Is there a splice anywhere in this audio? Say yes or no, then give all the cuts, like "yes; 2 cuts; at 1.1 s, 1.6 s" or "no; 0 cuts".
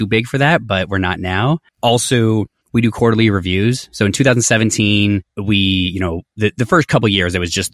no; 0 cuts